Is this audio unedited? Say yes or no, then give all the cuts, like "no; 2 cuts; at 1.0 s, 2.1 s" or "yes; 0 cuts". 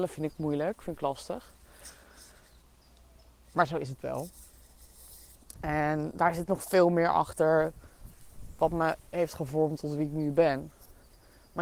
yes; 0 cuts